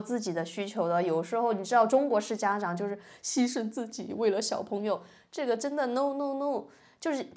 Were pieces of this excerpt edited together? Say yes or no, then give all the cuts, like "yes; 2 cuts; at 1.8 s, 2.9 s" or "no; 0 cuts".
no; 0 cuts